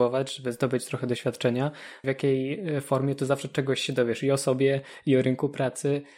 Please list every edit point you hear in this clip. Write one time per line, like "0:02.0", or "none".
0:02.0